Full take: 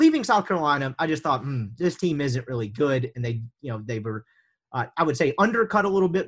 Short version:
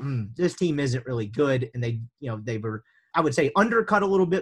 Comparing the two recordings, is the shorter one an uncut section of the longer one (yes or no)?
no